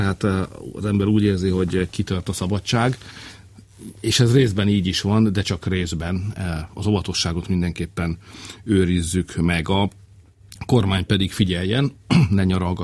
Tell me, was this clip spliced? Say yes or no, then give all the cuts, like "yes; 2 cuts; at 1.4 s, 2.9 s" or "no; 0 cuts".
no; 0 cuts